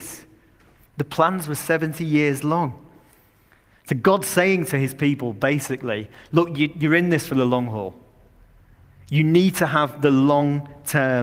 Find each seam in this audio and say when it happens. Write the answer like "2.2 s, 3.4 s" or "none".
none